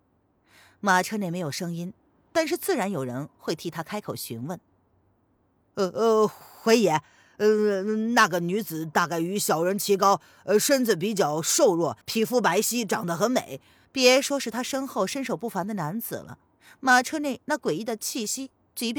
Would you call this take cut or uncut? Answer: cut